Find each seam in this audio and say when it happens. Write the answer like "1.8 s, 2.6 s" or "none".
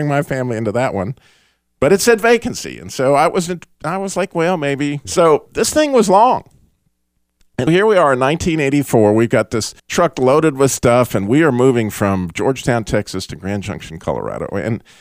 5.0 s, 7.7 s, 9.8 s